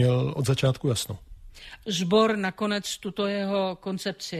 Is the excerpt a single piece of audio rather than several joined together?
no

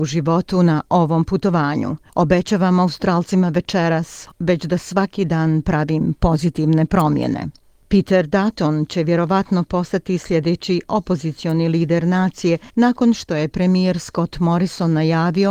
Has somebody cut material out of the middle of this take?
yes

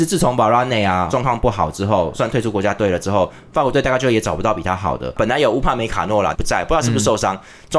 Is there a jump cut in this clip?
yes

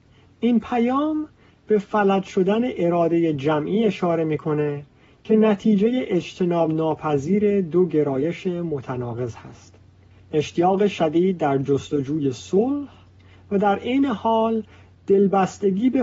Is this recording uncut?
yes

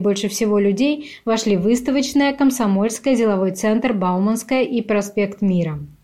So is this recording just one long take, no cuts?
yes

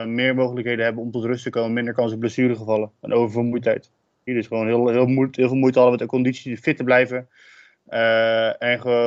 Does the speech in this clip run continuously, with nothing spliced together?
no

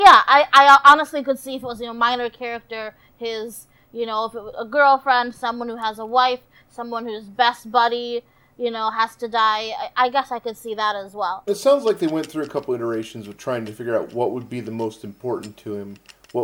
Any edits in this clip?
yes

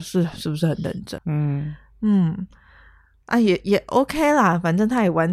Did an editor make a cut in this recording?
yes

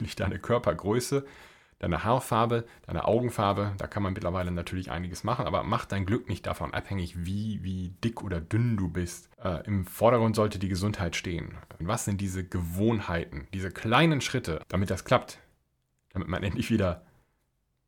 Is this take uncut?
no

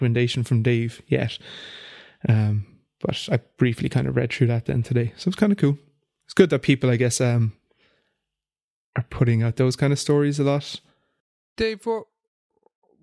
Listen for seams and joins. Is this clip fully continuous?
yes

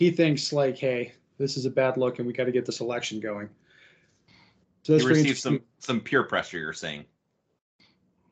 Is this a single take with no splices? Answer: yes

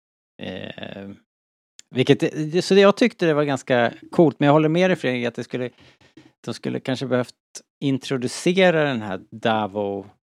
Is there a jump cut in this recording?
no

